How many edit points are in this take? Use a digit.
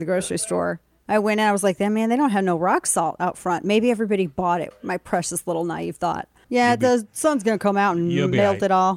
2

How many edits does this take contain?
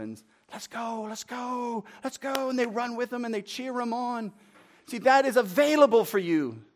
0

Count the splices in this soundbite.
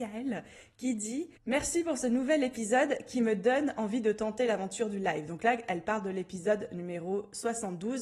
1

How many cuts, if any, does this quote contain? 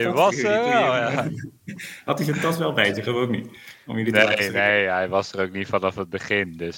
0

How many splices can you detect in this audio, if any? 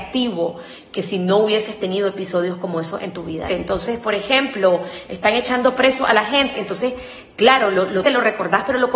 3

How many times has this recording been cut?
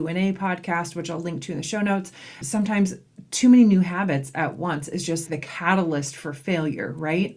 2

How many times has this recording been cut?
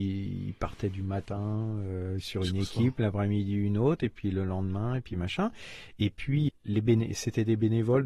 1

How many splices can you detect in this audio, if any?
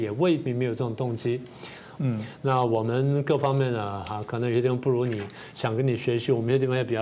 1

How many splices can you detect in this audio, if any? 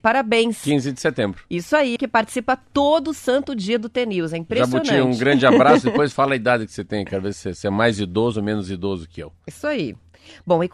1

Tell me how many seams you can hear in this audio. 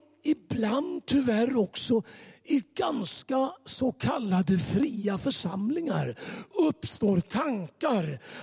0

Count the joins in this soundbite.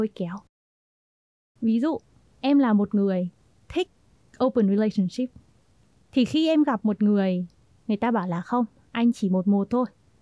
0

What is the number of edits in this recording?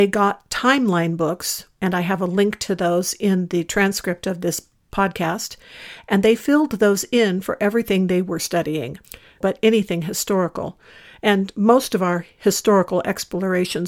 1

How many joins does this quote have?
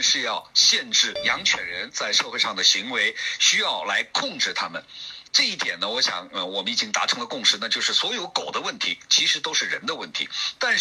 1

